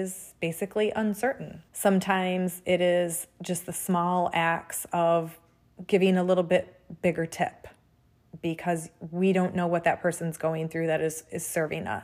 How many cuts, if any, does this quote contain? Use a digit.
1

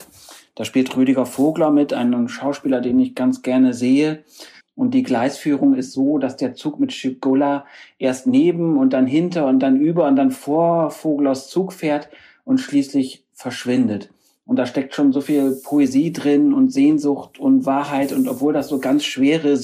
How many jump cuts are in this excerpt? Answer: 1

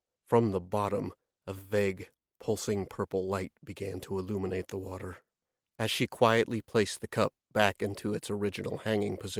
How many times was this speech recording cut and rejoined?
0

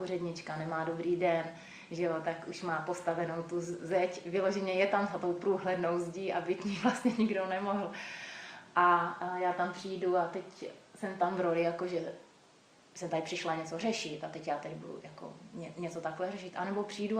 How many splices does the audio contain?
0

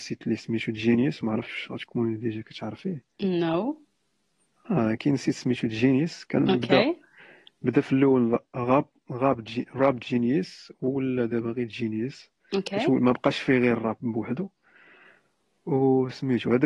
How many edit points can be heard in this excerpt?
0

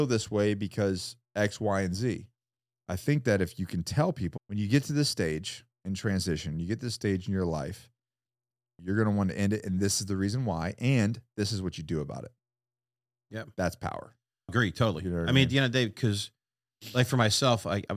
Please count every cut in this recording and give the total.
1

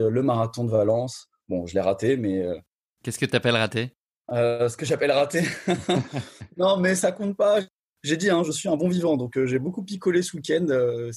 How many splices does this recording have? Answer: 0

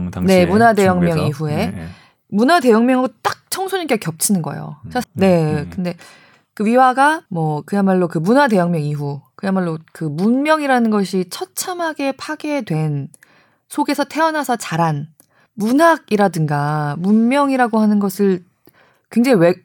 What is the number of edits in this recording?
2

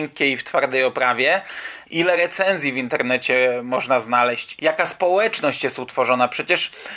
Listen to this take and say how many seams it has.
1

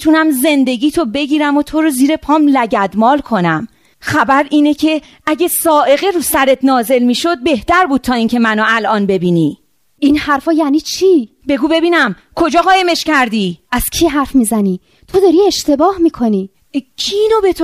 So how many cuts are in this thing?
1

